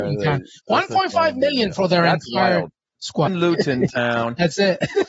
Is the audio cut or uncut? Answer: cut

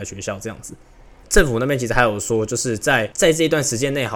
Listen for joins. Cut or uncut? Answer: cut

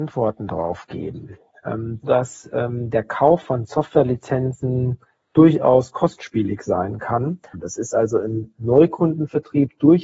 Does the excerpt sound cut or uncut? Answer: cut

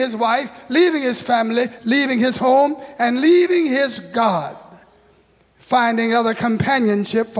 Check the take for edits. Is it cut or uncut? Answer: cut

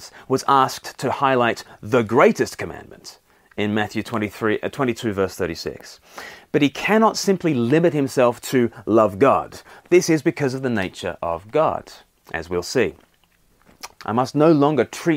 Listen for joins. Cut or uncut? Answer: cut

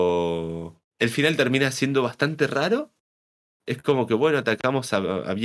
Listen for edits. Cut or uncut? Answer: uncut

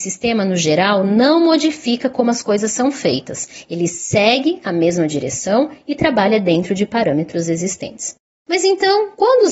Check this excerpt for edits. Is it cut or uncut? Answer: uncut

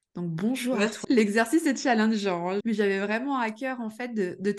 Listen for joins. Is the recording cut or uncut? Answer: cut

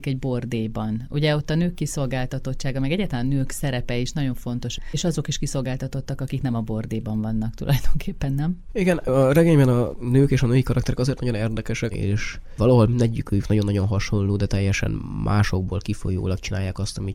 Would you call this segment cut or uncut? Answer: cut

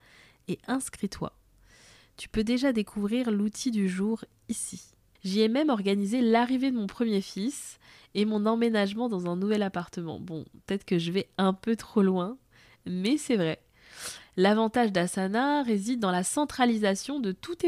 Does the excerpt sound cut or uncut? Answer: cut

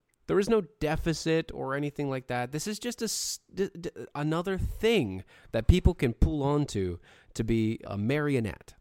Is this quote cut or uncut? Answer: cut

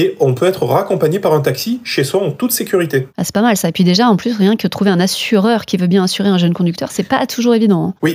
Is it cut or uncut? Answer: uncut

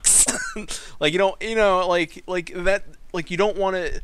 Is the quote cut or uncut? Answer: uncut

